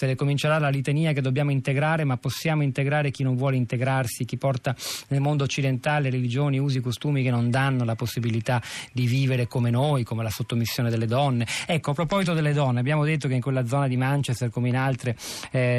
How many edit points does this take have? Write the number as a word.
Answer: zero